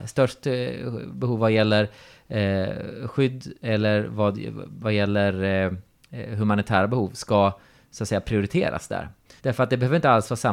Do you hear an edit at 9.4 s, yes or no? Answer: yes